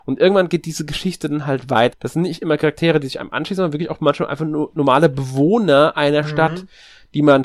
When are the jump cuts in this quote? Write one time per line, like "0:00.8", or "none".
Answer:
0:01.9